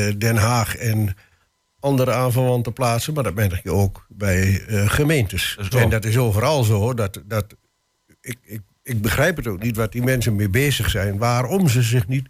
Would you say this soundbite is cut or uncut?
cut